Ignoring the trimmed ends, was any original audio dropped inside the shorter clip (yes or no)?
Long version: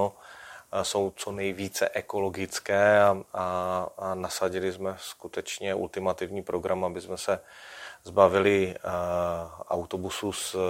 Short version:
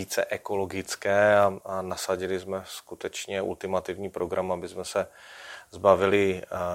yes